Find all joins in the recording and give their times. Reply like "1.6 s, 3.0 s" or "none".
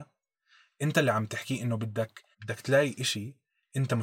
2.3 s